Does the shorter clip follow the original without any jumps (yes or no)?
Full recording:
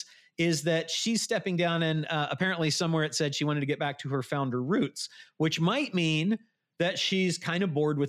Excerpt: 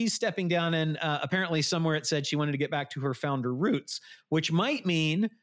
yes